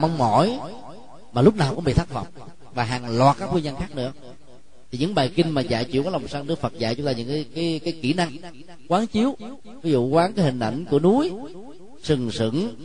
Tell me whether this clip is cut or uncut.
uncut